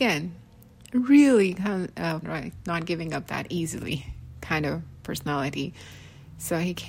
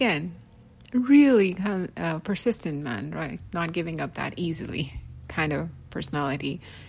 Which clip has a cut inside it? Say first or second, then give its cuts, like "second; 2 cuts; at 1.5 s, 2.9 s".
first; 1 cut; at 2.2 s